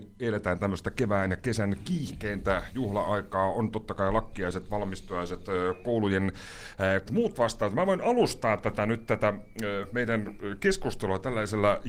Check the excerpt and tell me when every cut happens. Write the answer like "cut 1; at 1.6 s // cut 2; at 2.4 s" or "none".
cut 1; at 7.1 s